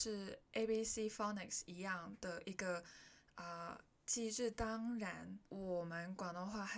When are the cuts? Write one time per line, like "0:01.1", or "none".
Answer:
0:05.5